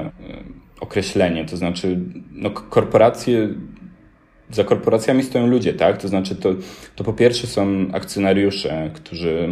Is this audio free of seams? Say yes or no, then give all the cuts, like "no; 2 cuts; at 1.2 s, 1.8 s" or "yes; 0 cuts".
yes; 0 cuts